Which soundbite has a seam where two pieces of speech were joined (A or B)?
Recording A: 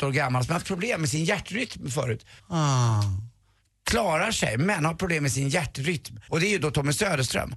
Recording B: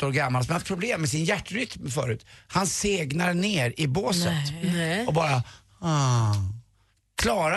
A